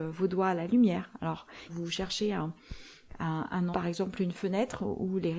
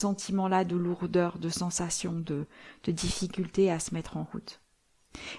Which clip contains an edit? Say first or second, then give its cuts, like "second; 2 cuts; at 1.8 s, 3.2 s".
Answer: first; 2 cuts; at 1.7 s, 3.7 s